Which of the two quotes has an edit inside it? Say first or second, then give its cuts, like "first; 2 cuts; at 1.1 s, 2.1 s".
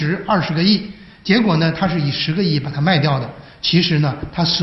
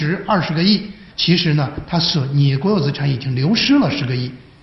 second; 1 cut; at 1.1 s